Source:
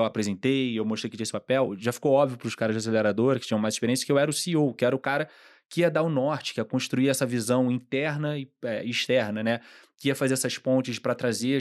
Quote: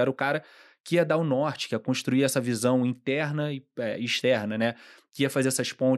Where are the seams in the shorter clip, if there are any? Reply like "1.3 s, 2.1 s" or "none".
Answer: none